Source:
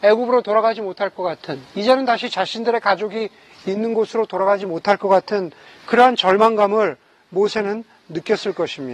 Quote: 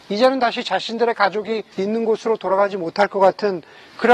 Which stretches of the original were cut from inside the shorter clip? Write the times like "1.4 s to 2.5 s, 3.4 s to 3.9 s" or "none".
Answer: 3.4 s to 3.6 s